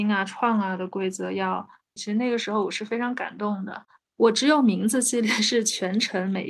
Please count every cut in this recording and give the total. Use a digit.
1